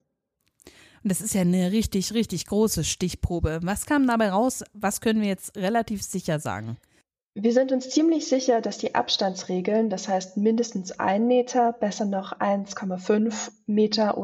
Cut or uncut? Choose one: uncut